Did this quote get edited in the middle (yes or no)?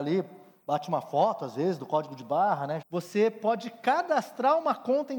yes